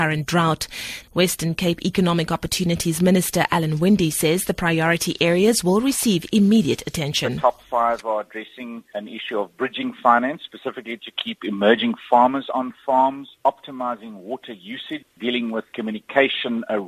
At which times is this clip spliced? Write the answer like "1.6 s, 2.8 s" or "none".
1.0 s